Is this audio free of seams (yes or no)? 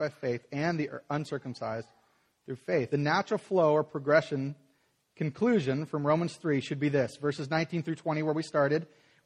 yes